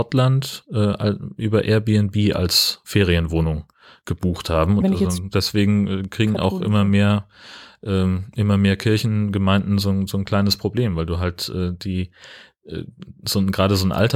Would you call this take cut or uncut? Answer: cut